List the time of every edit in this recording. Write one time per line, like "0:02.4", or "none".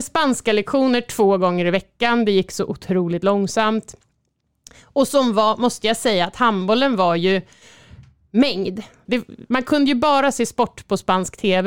0:09.1